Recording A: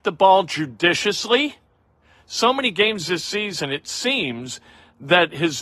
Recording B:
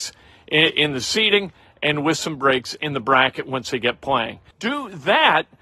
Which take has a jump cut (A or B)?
B